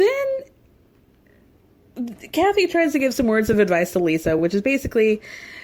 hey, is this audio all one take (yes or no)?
yes